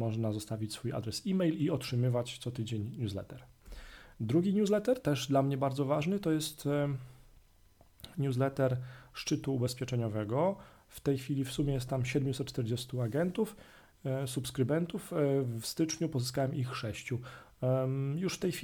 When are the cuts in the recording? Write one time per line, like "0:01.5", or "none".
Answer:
none